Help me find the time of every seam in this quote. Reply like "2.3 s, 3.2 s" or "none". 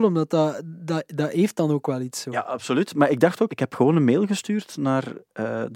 3.5 s